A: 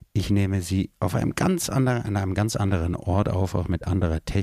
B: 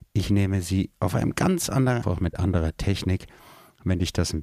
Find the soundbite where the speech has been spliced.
B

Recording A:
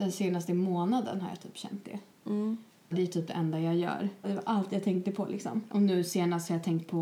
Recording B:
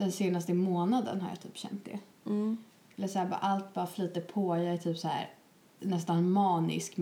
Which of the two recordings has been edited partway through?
A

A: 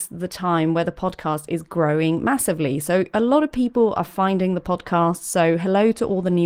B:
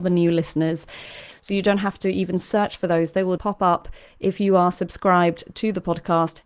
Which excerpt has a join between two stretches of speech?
B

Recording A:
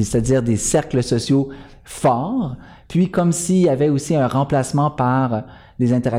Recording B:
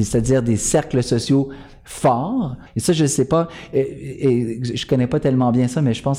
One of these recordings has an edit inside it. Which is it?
B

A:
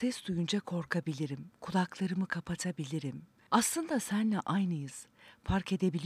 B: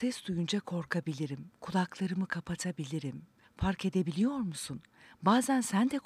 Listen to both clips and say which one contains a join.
B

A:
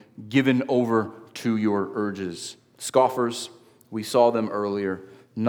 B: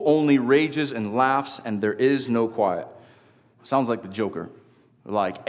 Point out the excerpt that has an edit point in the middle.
B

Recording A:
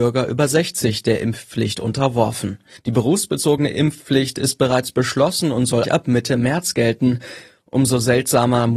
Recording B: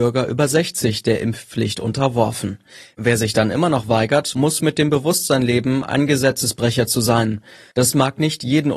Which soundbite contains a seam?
A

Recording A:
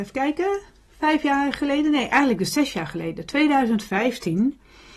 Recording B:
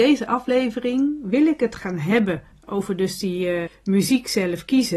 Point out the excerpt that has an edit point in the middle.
B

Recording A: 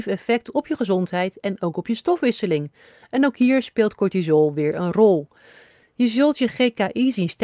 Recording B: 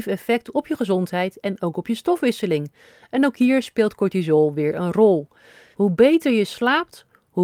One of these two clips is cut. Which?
B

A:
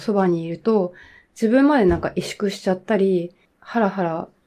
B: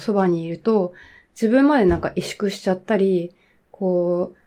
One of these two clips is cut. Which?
A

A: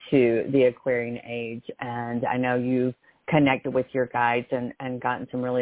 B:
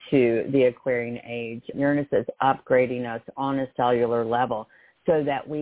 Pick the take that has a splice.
B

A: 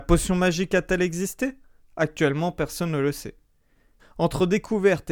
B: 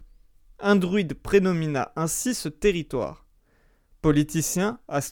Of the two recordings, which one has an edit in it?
A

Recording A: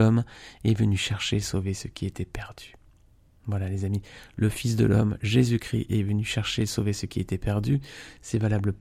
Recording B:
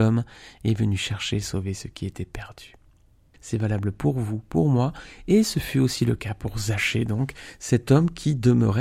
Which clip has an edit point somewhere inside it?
B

